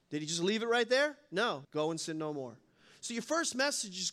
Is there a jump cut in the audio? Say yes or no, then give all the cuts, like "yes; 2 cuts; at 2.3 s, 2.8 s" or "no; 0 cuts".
yes; 1 cut; at 1.6 s